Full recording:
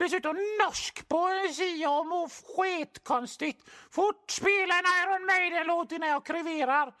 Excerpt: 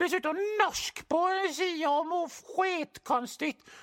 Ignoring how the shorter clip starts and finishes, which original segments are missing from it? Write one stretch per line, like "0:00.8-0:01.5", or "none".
none